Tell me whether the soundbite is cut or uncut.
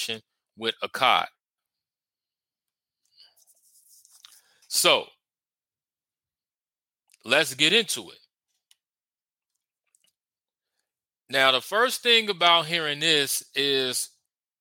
cut